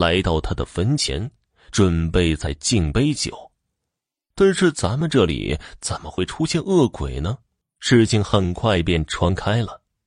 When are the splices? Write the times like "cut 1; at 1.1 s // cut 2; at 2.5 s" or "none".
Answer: cut 1; at 4.3 s // cut 2; at 7.6 s